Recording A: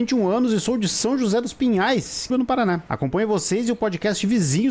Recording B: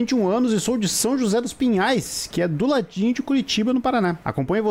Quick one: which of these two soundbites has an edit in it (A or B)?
A